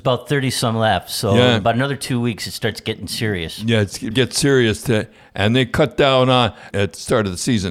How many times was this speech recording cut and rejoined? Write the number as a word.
two